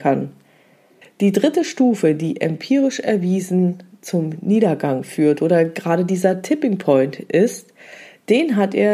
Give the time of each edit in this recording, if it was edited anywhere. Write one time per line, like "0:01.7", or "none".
0:01.0